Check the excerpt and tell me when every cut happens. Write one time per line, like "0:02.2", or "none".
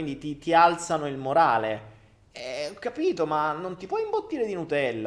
none